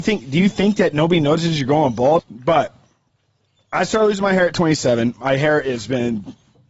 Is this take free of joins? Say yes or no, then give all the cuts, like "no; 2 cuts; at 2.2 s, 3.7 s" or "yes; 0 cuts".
no; 1 cut; at 2.2 s